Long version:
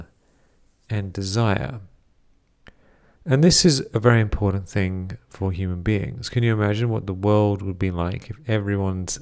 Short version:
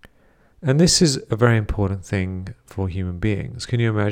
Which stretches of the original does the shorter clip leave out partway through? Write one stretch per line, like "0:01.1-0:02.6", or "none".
none

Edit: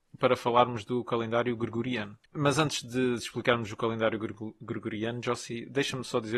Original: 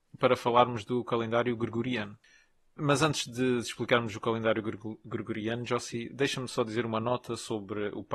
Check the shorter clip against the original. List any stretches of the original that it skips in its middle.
0:02.3-0:02.7

